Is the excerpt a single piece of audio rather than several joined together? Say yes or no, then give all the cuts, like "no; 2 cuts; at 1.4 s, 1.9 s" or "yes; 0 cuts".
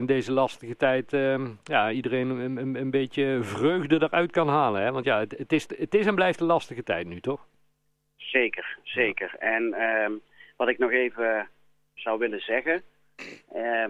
yes; 0 cuts